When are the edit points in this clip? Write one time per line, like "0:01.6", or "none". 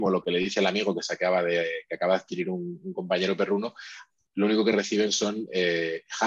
none